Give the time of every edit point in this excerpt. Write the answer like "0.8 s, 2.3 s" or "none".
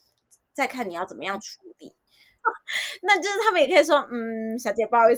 2.4 s